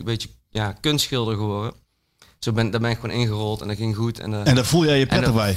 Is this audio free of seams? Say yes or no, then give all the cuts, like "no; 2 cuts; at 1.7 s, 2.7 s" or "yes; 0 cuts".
yes; 0 cuts